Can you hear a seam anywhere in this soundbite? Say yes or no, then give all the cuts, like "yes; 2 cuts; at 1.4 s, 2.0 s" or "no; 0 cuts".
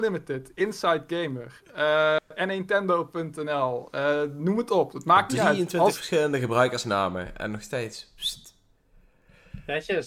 no; 0 cuts